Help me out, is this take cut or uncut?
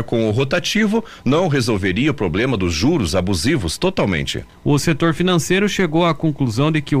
uncut